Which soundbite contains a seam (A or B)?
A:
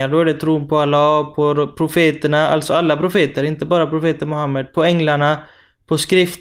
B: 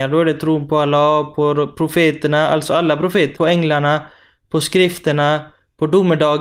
B